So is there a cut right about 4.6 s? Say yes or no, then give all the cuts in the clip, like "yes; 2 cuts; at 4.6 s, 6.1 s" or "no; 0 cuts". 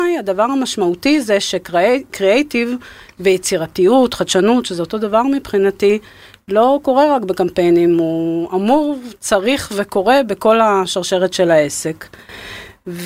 no; 0 cuts